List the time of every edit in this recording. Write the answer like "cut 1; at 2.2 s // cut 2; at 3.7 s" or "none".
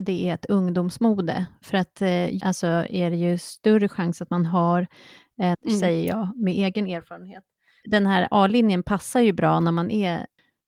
cut 1; at 2.4 s // cut 2; at 5.5 s